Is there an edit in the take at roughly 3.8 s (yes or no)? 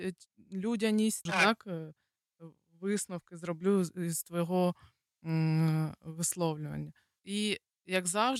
no